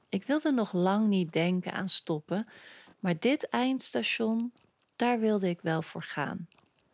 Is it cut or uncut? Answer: uncut